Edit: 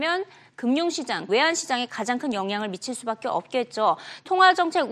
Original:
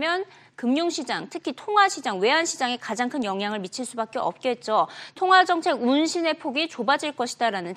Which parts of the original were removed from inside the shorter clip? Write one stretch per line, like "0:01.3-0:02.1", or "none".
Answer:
0:01.3-0:02.2